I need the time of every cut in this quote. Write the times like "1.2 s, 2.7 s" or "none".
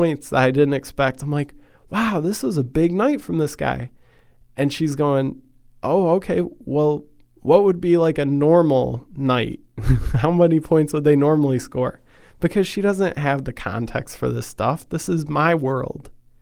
none